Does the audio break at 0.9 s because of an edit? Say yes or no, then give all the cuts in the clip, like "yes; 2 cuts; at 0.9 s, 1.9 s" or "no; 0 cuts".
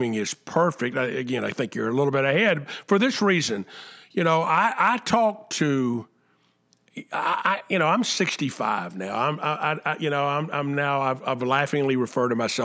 no; 0 cuts